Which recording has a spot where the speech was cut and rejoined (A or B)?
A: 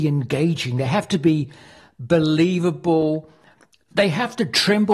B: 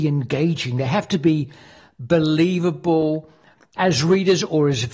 B